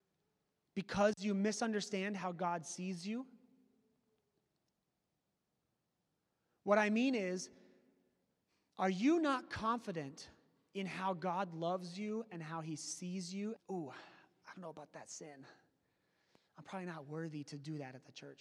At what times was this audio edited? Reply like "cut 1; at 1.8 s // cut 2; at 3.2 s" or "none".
cut 1; at 13.6 s